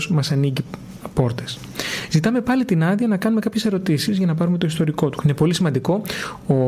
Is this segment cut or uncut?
cut